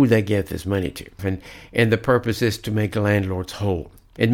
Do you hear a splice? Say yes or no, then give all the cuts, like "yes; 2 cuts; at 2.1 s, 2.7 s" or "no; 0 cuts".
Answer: yes; 1 cut; at 1.2 s